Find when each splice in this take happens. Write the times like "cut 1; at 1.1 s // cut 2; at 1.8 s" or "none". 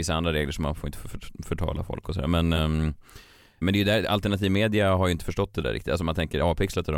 none